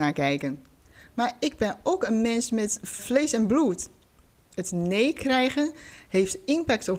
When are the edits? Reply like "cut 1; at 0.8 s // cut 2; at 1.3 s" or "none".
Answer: cut 1; at 3.0 s